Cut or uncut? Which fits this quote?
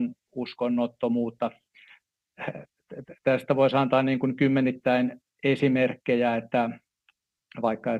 uncut